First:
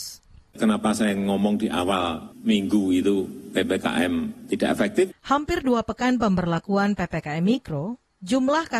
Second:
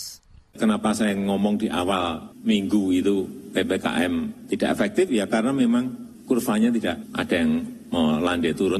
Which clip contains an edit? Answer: first; 1 cut; at 5.1 s

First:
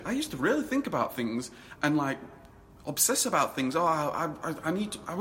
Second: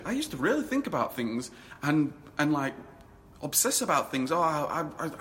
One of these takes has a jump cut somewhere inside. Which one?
first; 1 cut; at 1.8 s

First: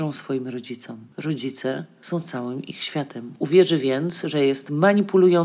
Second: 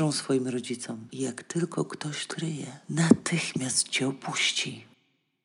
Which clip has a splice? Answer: second; 1 cut; at 1.1 s

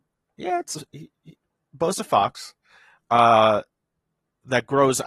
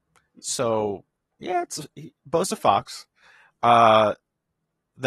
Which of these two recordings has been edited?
second; 1 cut; at 2.2 s

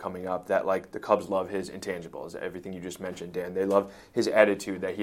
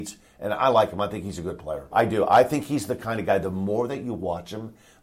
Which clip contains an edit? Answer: second; 1 cut; at 1.9 s

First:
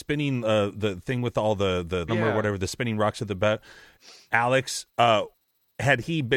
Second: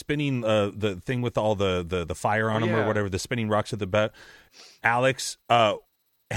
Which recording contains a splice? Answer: first; 1 cut; at 2.1 s

